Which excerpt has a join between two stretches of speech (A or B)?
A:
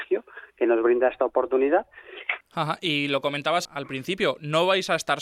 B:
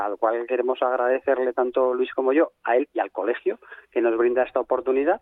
A